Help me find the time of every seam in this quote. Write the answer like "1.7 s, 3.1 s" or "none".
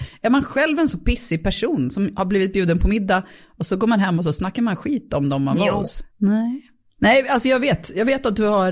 6.1 s